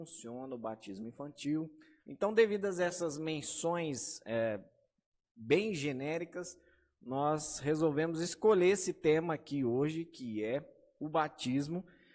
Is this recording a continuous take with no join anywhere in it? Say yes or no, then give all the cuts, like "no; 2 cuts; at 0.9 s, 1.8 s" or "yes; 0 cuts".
no; 1 cut; at 2.0 s